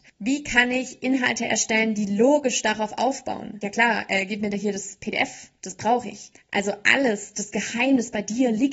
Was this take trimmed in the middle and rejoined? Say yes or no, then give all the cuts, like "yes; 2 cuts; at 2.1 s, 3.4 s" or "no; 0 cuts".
yes; 2 cuts; at 3.6 s, 6.3 s